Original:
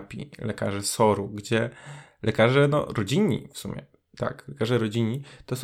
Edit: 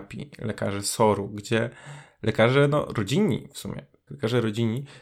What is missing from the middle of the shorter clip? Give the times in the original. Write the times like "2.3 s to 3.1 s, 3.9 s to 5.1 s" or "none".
4.1 s to 4.4 s